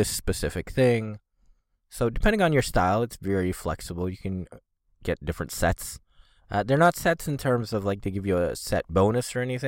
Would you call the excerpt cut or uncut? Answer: uncut